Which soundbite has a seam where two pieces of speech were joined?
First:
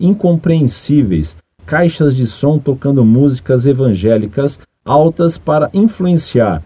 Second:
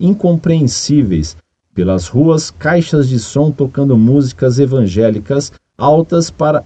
first; 1 cut; at 1.6 s

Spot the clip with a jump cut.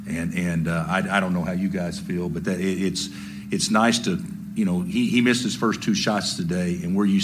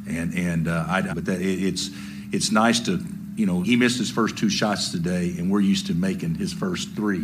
second; 2 cuts; at 1.1 s, 3.6 s

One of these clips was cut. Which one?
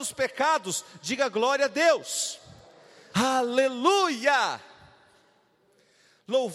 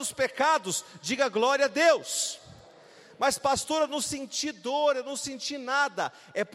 first; 1 cut; at 3.1 s

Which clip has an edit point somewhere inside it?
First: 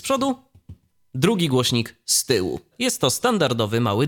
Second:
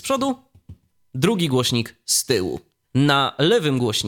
first; 1 cut; at 2.7 s

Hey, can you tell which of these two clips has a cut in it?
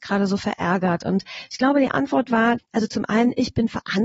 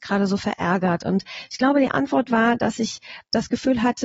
first; 1 cut; at 2.6 s

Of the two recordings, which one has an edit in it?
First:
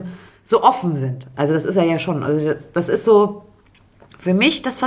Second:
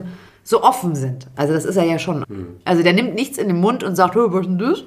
second; 1 cut; at 2.2 s

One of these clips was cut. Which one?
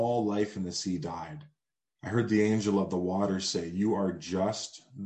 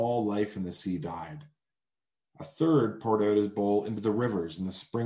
first; 1 cut; at 1.9 s

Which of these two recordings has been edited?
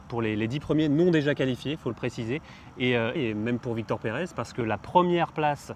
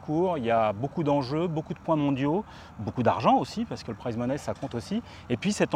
first; 1 cut; at 3.2 s

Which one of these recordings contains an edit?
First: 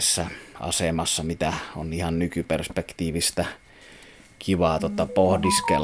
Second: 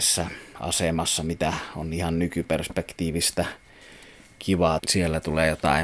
second; 1 cut; at 4.8 s

